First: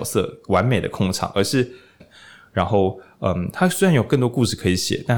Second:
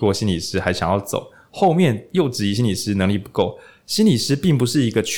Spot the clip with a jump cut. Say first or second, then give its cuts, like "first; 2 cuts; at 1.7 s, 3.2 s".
first; 1 cut; at 2.0 s